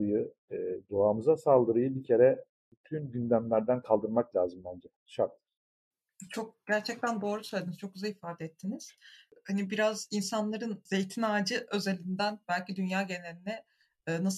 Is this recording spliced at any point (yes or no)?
no